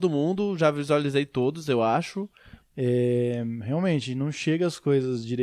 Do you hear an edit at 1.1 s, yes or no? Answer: no